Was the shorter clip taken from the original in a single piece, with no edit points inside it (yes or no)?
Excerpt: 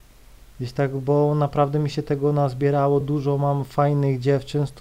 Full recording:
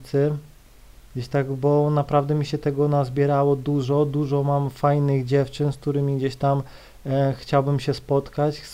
no